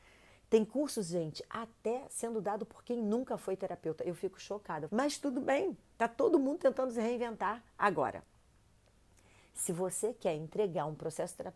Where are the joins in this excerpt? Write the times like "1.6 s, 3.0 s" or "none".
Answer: 4.9 s